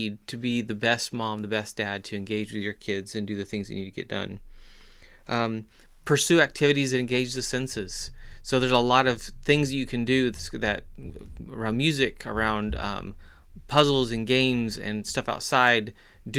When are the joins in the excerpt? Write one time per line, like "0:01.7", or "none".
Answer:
none